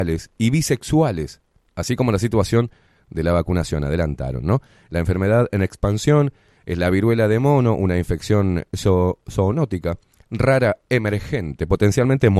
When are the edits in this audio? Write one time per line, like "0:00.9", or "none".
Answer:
none